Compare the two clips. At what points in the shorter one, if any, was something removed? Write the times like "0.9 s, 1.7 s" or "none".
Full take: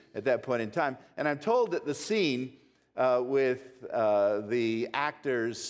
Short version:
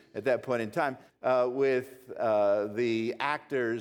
1.1 s